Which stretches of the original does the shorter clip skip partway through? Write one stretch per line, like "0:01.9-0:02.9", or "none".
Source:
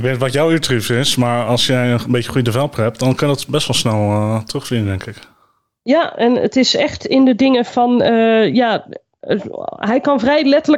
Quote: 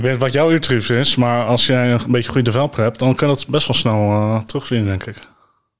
none